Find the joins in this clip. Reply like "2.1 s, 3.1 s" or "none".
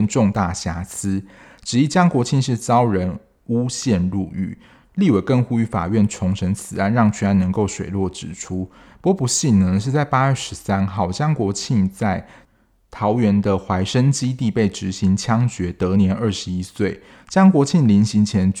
none